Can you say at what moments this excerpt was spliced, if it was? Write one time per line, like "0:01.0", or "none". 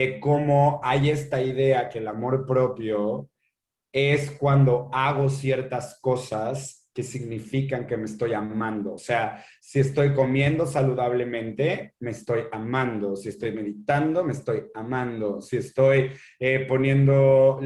none